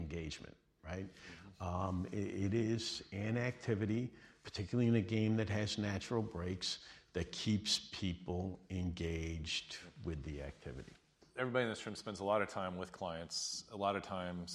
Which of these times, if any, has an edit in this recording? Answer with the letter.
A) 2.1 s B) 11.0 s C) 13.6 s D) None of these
D